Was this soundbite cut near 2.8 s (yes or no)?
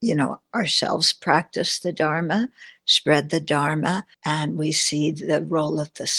no